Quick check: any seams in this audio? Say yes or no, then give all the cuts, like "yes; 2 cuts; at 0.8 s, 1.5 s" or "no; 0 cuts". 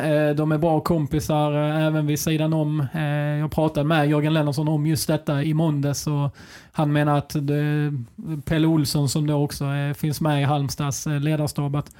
yes; 1 cut; at 5.4 s